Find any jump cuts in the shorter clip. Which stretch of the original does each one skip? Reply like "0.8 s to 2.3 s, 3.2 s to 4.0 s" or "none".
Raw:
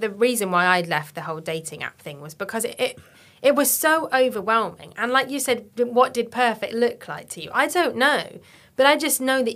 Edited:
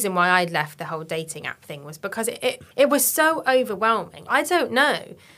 3.1 s to 3.4 s, 4.9 s to 7.5 s

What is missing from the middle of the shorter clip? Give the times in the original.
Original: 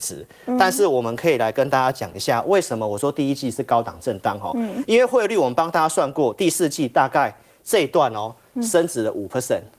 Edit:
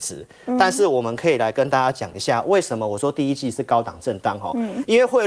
none

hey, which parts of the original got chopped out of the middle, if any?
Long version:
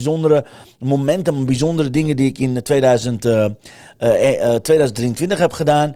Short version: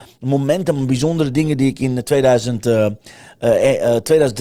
none

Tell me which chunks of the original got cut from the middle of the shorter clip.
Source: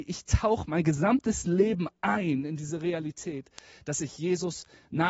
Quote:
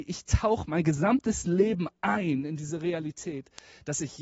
none

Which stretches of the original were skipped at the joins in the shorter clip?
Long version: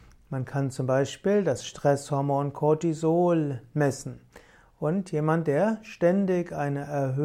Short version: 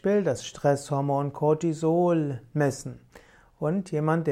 none

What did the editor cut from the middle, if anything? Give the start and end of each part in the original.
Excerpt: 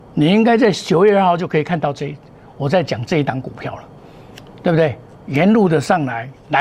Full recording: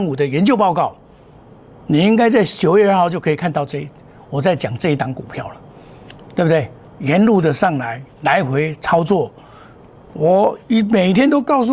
none

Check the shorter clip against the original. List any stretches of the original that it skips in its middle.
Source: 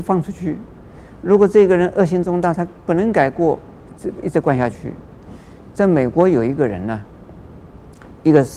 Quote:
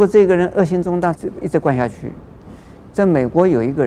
2.6 s to 4.0 s

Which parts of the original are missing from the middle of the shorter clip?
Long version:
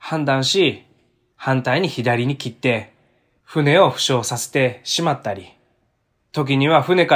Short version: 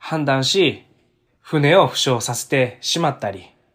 1.3 s to 3.3 s

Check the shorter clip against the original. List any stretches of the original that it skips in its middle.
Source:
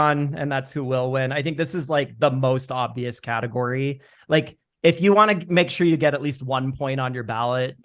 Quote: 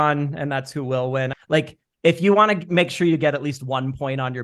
1.3 s to 4.1 s

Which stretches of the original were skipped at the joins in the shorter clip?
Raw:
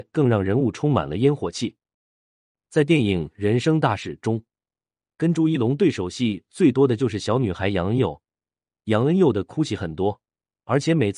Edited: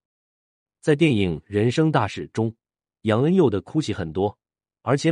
4.8 s to 8.7 s

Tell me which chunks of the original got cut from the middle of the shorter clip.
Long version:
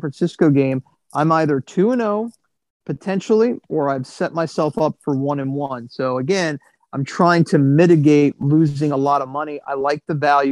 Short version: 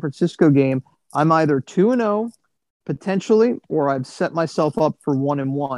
none

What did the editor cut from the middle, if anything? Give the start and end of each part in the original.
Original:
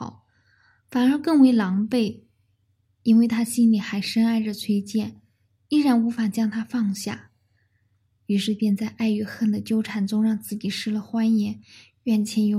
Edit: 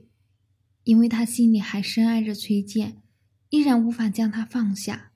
none

